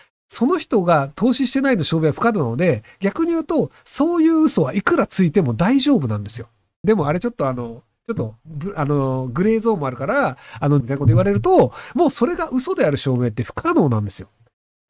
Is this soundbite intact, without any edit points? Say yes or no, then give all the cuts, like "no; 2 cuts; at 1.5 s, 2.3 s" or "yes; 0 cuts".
no; 2 cuts; at 6.8 s, 10.8 s